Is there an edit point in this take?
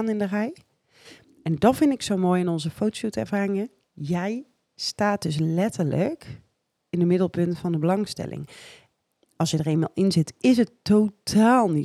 yes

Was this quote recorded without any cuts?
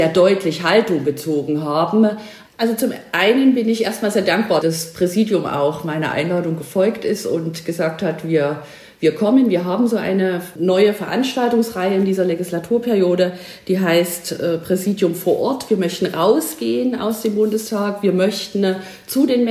no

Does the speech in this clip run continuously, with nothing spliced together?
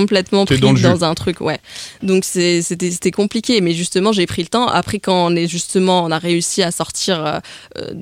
yes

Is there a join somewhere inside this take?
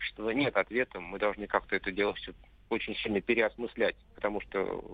no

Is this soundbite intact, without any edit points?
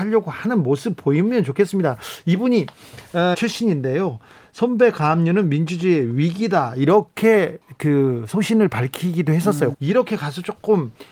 no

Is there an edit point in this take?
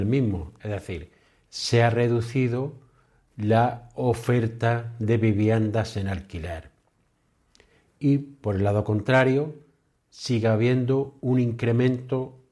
no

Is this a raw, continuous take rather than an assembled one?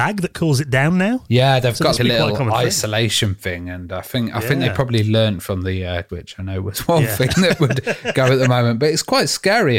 no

